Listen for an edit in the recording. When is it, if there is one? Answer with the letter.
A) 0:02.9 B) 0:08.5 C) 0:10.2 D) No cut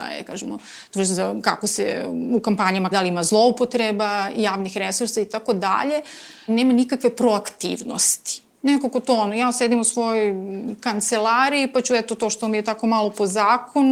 A